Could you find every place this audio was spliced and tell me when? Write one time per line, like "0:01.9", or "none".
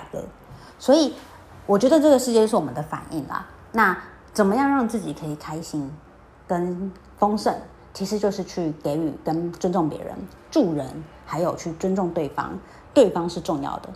0:12.9